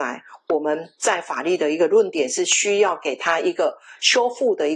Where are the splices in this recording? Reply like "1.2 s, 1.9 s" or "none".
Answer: none